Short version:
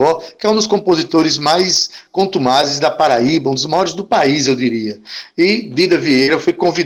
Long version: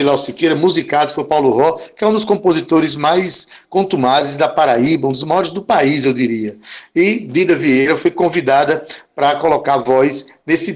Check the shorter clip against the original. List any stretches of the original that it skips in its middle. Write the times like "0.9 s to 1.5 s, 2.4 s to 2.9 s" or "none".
none